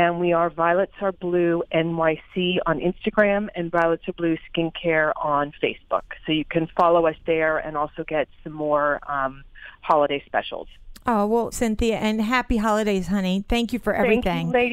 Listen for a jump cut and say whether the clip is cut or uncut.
cut